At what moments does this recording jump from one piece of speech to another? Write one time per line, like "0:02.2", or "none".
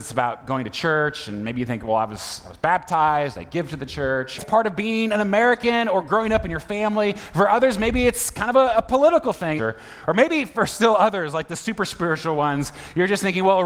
0:04.4
0:09.6